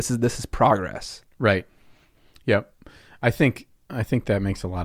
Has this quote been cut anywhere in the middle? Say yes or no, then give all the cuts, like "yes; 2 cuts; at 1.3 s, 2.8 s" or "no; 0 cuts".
no; 0 cuts